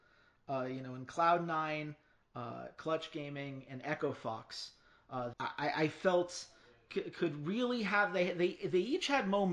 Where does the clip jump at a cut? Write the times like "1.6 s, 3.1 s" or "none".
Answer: 5.3 s